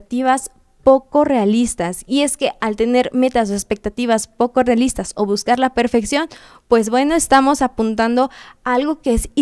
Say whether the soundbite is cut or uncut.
uncut